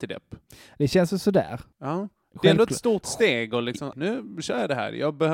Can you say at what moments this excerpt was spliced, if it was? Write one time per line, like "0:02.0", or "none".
0:03.9